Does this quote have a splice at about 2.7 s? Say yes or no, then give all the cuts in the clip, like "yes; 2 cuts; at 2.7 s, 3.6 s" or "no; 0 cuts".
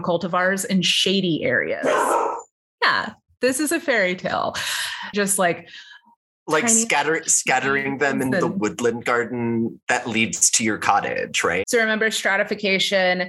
yes; 3 cuts; at 2.7 s, 5.1 s, 11.6 s